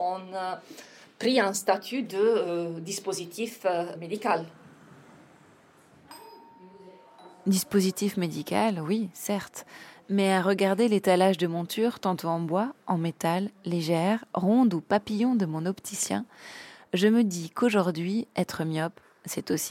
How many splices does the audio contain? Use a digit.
0